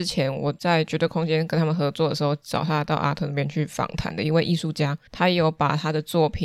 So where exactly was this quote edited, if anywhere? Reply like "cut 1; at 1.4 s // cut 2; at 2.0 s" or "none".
cut 1; at 5.1 s